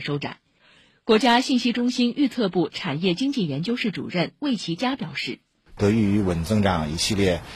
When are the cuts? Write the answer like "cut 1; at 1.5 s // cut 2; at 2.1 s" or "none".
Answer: cut 1; at 5.8 s